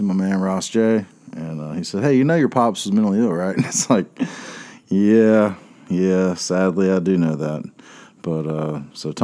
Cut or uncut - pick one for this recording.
uncut